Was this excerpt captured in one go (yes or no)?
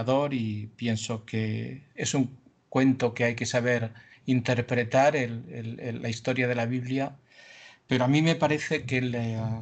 yes